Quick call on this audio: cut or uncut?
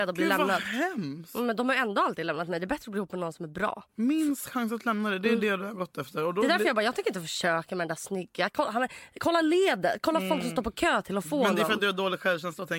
cut